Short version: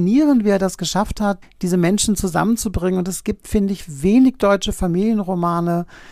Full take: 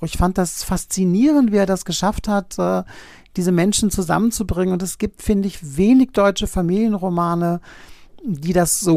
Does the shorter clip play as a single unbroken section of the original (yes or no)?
no